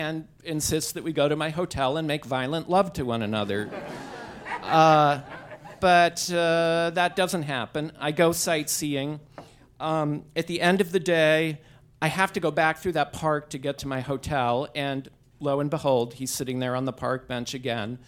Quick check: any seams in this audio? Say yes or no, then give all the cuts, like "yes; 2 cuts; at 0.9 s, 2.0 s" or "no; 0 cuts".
no; 0 cuts